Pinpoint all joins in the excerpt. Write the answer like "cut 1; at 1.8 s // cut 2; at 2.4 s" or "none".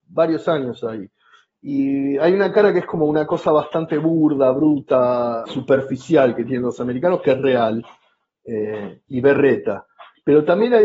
cut 1; at 5.5 s